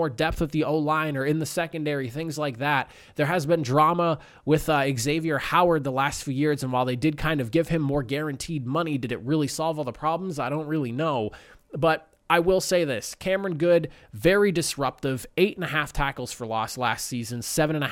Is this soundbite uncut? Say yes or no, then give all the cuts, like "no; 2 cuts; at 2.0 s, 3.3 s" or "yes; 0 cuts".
yes; 0 cuts